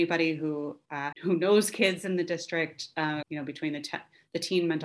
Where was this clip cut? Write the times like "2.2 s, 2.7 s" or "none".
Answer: 1.1 s, 3.2 s